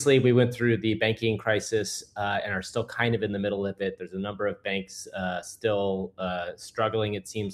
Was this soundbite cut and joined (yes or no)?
no